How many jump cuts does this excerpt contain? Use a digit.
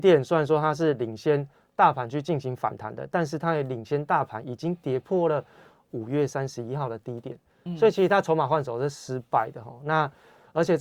0